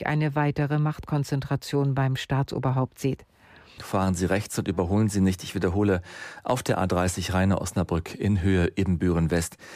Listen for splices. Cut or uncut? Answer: cut